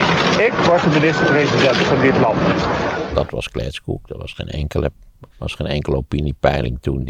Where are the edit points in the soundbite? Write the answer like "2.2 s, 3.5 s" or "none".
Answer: 5.3 s